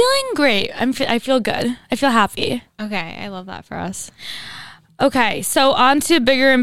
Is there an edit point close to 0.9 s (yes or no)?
no